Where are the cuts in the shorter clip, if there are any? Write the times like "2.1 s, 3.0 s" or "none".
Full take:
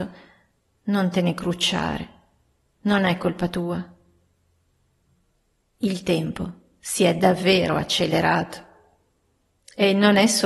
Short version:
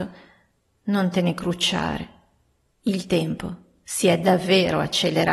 2.7 s

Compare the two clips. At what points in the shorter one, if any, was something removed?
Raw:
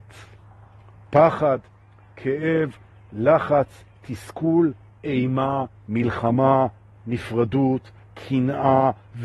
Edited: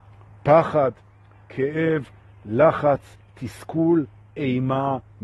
none

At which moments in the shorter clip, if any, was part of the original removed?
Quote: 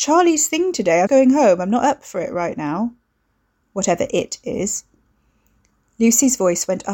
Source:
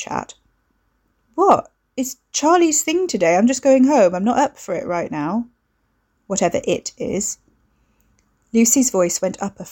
1.1 s

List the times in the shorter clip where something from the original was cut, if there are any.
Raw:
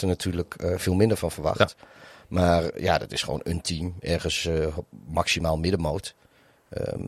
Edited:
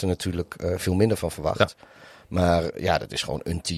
none

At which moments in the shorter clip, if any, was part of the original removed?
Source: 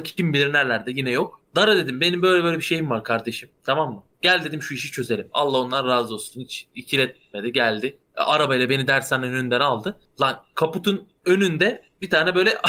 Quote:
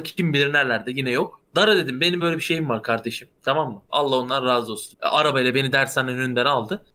2.2 s, 3.9 s, 4.9 s

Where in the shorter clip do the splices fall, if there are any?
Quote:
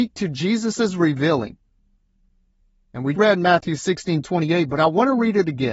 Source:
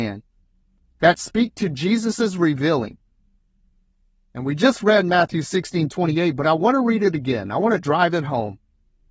3.1 s

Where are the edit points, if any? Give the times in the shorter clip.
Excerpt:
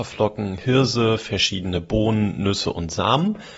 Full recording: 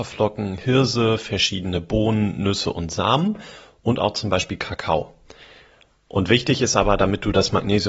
none

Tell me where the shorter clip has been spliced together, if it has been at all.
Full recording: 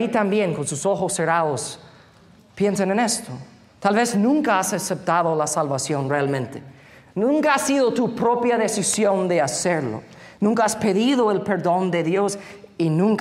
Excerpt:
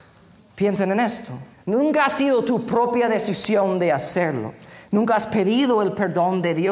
1.5 s

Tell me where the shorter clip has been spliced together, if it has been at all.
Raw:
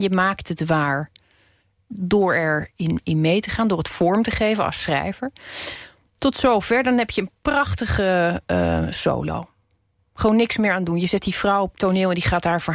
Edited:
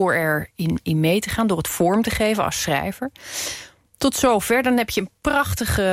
none

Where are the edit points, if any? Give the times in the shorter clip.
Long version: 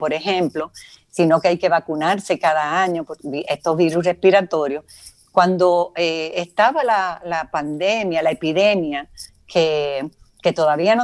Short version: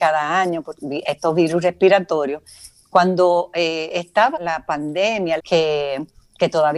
4.3 s, 5.4 s

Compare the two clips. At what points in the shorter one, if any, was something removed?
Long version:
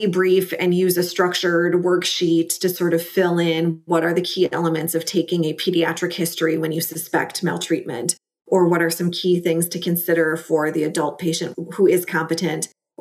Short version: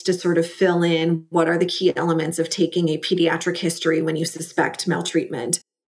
none

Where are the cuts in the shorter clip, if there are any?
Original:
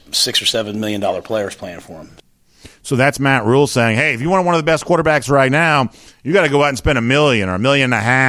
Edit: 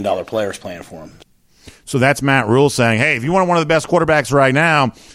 none

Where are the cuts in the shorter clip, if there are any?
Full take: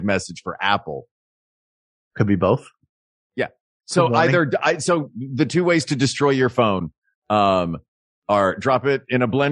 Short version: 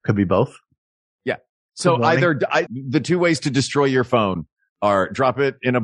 2.7 s, 4.7 s

